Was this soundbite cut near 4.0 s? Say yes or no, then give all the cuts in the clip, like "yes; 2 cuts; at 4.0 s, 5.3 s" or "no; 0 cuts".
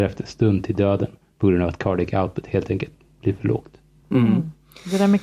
no; 0 cuts